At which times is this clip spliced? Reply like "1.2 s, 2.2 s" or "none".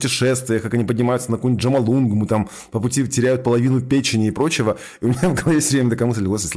none

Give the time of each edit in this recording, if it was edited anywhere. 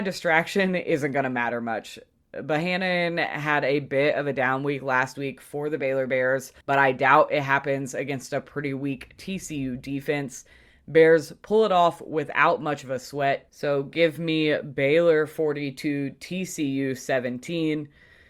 6.6 s

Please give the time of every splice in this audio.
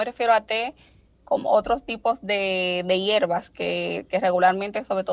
none

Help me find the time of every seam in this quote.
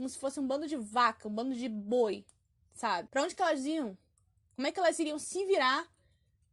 3.1 s

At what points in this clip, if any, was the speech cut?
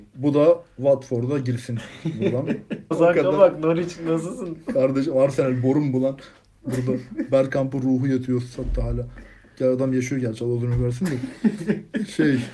2.9 s

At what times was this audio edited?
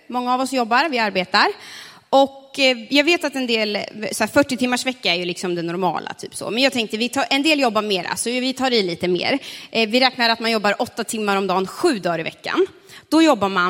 none

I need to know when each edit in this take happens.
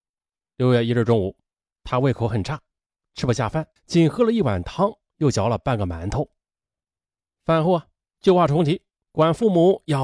3.8 s

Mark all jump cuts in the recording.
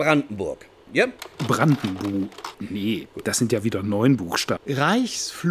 2.5 s, 4.6 s

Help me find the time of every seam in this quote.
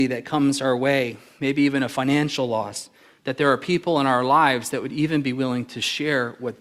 none

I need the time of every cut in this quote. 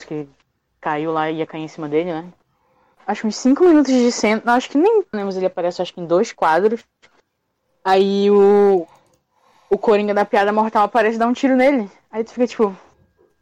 2.9 s, 5.1 s

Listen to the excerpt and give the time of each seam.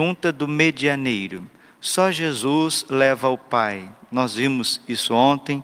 none

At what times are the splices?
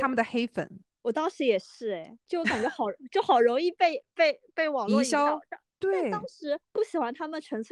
5.8 s

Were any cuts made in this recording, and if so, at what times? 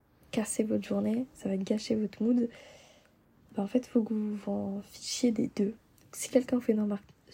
none

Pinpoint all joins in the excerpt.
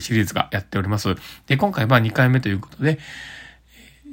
none

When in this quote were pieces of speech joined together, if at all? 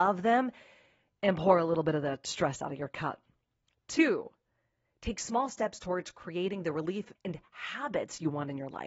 7.2 s

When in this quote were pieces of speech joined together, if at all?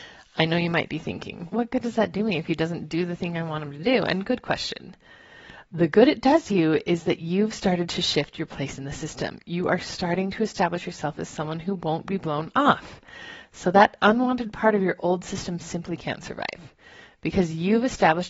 1.5 s

